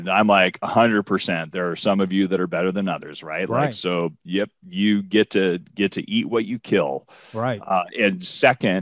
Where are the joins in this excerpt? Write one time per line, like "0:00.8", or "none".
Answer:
none